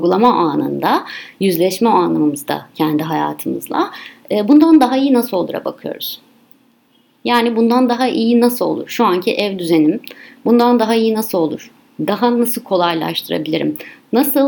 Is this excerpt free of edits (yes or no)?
yes